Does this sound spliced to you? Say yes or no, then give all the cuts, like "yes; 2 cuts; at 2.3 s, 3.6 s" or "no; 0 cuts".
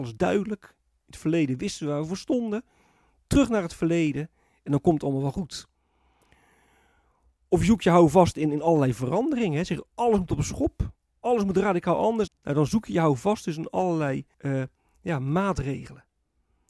yes; 2 cuts; at 12.3 s, 14.3 s